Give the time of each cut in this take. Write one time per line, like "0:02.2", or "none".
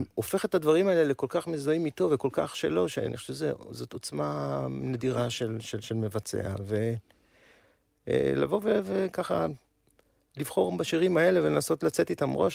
0:05.6